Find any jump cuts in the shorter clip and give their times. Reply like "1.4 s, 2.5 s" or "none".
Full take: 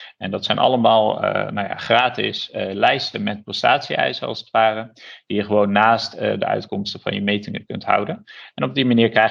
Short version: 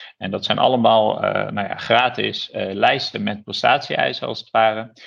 none